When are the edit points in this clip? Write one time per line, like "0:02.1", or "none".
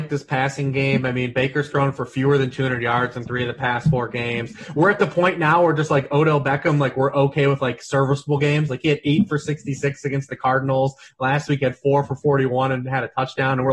none

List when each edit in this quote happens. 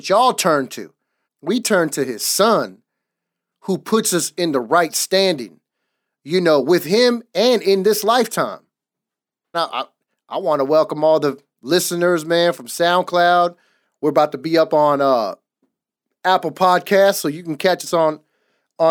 0:01.2
0:09.5

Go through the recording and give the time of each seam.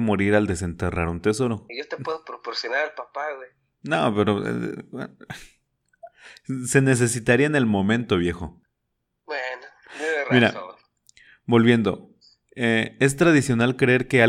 0:01.7

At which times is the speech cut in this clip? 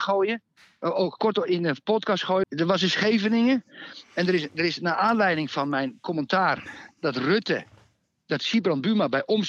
0:02.4

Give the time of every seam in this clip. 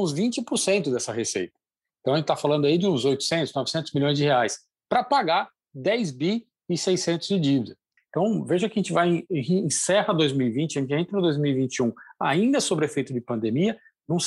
0:08.0

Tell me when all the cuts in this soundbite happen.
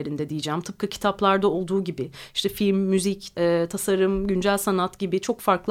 0:03.3

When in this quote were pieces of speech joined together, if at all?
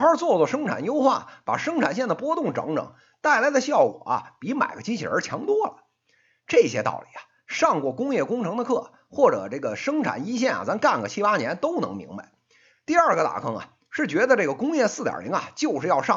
0:12.7

